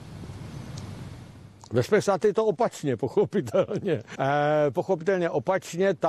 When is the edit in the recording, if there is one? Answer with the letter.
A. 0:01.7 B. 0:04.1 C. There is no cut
B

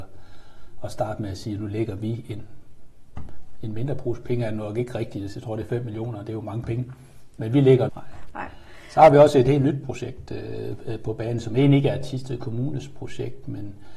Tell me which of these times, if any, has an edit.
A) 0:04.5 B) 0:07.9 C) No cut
B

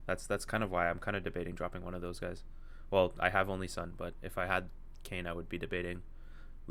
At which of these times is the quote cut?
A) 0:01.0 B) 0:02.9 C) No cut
C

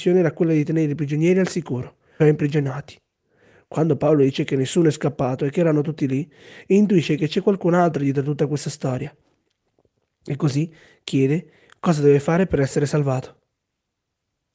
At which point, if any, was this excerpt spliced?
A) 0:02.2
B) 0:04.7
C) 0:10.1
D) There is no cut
A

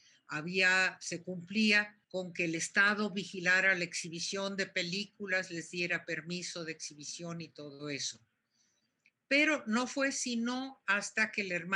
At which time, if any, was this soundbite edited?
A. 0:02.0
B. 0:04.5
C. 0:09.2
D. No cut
A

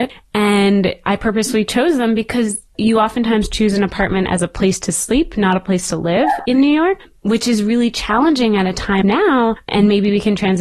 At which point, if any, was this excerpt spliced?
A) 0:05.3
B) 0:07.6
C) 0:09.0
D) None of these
C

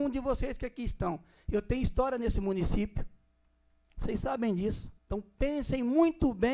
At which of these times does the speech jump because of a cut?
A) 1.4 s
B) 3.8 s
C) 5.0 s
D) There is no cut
C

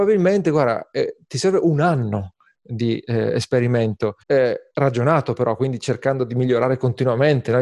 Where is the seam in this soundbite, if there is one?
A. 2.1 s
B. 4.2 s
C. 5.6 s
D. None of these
B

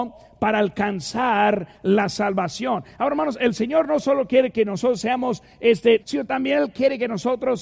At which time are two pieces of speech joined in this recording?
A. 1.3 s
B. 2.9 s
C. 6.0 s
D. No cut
C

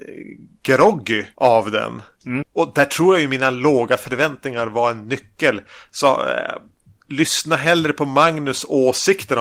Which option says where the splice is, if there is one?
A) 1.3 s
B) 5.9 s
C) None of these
A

